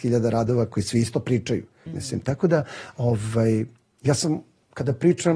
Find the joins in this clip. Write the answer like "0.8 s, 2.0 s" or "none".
1.9 s